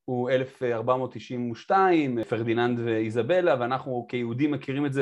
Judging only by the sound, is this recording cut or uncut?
uncut